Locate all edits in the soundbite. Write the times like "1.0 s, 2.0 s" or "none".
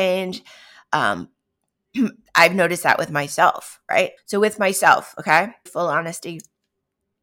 4.2 s, 5.7 s